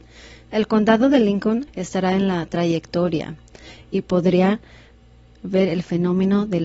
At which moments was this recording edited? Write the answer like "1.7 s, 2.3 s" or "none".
1.7 s